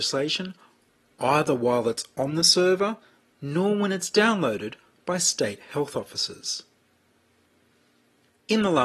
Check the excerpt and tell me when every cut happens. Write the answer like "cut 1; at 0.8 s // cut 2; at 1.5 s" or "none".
none